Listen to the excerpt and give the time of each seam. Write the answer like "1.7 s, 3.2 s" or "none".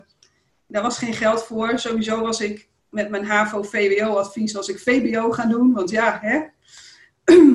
none

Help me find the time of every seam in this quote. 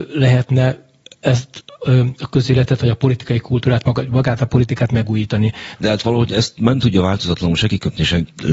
5.8 s

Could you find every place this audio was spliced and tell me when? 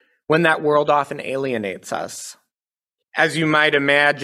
3.0 s

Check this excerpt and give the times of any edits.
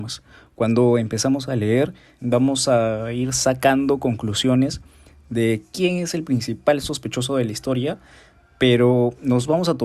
2.2 s

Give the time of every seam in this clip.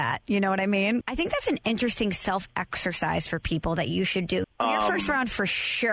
1.0 s, 4.4 s

